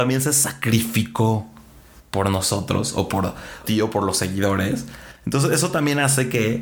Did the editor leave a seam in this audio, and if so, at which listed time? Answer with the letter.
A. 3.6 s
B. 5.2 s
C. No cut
A